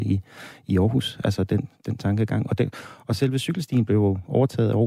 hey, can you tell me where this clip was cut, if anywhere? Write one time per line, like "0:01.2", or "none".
none

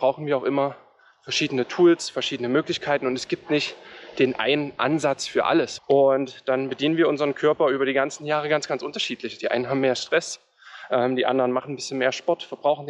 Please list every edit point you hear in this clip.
0:05.8

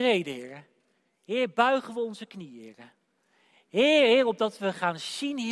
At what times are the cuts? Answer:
none

